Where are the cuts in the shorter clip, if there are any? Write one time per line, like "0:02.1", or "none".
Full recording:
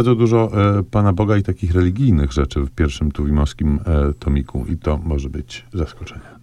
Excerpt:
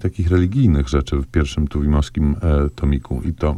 none